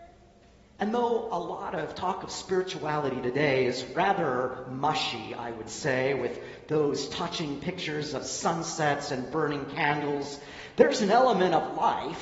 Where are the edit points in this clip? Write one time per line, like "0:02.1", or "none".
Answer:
none